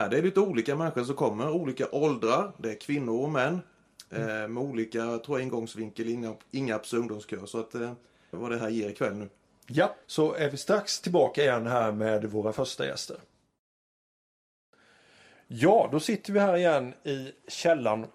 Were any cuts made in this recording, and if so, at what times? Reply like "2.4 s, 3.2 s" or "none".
8.3 s, 10.0 s